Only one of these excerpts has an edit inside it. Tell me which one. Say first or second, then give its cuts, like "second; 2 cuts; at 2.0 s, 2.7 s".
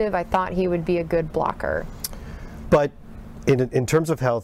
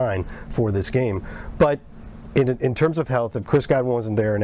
first; 1 cut; at 2.6 s